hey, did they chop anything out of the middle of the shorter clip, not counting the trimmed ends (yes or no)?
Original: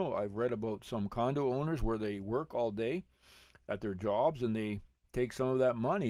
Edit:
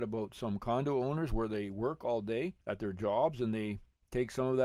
yes